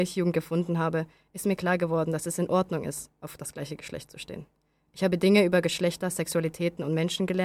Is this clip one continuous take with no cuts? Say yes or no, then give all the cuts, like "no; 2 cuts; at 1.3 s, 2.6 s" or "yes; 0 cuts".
yes; 0 cuts